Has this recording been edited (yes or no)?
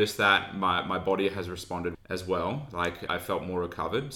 yes